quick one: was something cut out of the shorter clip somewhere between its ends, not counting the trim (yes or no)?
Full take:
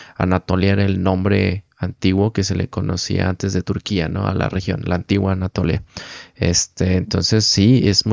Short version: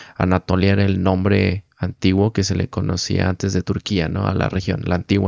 no